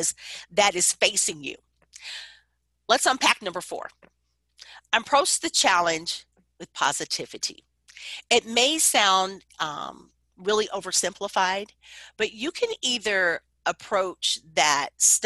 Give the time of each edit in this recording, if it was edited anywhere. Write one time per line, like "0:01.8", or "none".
none

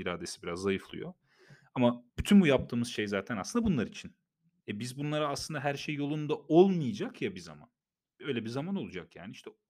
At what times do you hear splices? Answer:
0:02.1
0:04.6

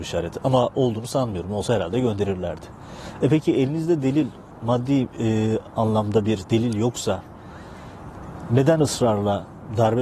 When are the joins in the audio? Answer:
none

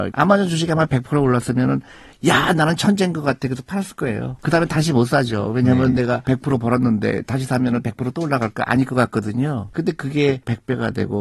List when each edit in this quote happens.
none

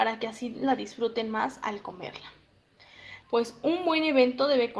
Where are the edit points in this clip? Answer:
0:03.2

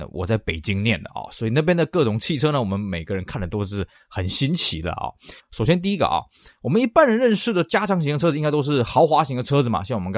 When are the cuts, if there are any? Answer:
0:05.4

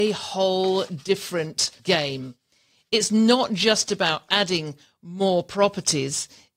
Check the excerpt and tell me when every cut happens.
0:01.8

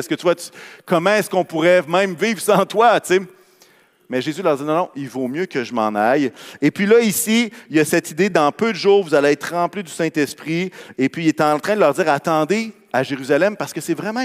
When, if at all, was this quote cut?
none

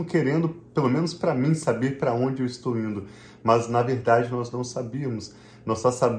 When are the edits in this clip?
none

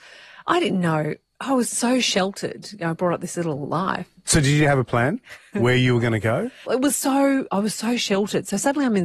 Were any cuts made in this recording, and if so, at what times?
0:06.6

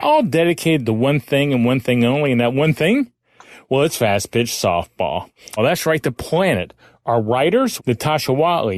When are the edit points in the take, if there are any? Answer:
0:05.6
0:07.8

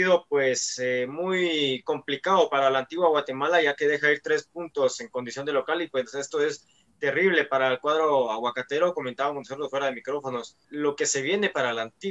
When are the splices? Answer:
0:10.6

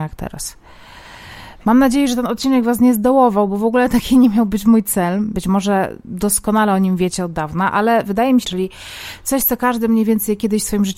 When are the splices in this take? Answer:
0:01.6
0:05.3
0:08.4

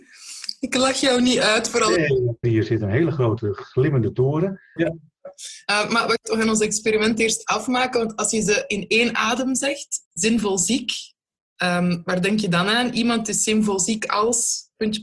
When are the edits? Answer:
0:02.4
0:04.8

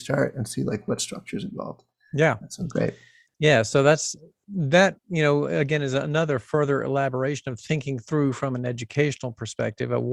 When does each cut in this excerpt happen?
none

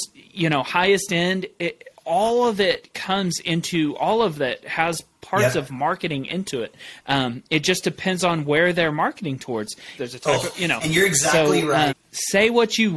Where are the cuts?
0:10.0
0:11.9

